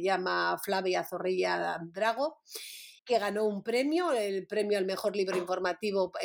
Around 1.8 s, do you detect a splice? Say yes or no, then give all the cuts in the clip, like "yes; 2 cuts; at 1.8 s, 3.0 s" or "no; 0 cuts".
no; 1 cut; at 3.0 s